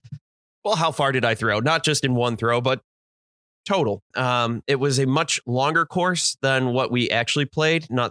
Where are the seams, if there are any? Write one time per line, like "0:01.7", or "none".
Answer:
0:04.1